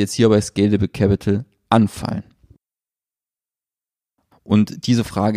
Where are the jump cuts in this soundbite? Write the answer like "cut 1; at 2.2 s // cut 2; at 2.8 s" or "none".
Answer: cut 1; at 4.3 s